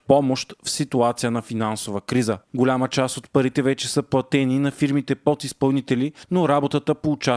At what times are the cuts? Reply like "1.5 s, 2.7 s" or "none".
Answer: 2.4 s